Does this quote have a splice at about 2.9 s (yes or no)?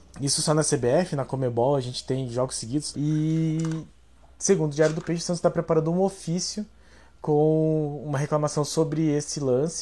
yes